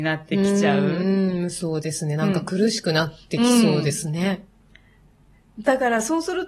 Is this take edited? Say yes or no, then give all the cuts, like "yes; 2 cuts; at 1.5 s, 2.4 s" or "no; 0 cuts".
no; 0 cuts